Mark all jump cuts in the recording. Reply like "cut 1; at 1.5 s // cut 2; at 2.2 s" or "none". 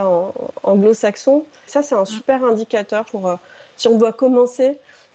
cut 1; at 1.7 s // cut 2; at 3.0 s